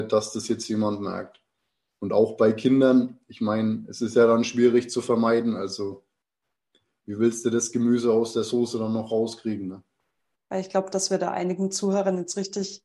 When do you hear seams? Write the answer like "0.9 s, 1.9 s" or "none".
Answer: 10.3 s